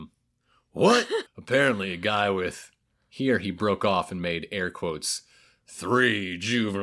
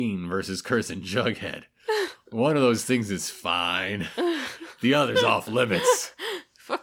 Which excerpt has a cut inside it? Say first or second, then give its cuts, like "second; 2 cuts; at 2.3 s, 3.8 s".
first; 1 cut; at 1.3 s